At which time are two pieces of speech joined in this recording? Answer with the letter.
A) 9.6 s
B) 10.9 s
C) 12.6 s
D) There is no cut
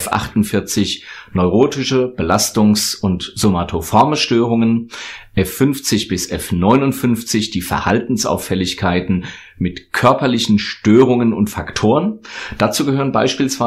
D